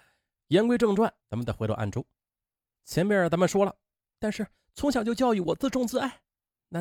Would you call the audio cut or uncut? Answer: cut